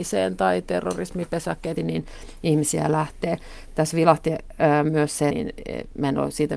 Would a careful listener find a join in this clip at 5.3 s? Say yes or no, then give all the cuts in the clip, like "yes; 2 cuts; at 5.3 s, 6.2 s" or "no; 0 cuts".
yes; 2 cuts; at 1.8 s, 5.3 s